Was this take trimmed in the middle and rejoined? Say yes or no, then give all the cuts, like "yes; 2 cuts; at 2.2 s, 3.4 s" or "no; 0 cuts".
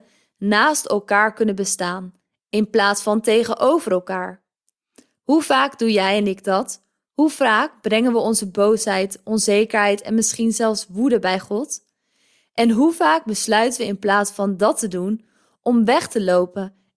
no; 0 cuts